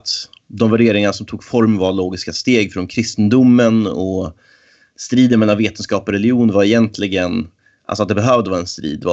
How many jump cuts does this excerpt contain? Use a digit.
0